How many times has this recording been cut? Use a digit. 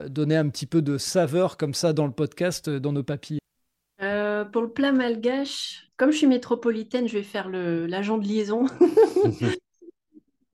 1